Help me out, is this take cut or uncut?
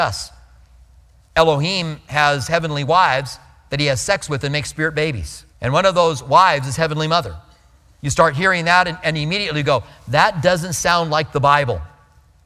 cut